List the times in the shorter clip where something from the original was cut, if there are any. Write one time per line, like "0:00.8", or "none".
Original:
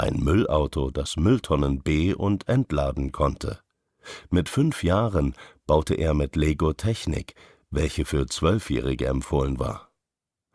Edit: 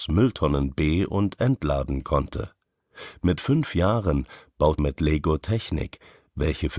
0:04.8